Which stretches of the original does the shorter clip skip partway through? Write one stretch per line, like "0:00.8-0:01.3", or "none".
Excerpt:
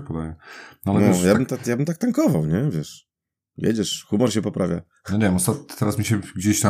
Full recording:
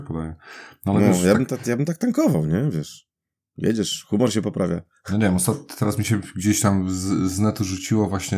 none